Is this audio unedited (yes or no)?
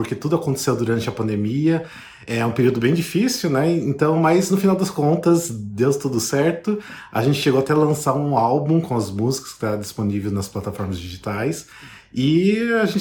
yes